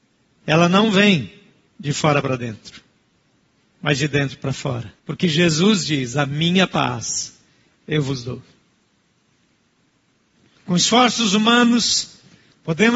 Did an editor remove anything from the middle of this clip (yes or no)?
yes